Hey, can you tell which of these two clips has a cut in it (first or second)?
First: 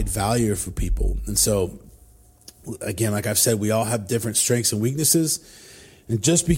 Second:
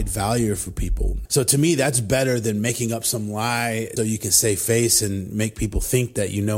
second